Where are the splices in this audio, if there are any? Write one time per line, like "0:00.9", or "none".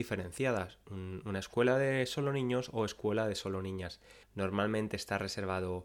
0:04.2